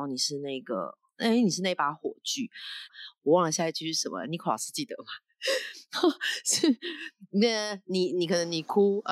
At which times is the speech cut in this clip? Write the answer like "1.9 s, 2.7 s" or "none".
2.9 s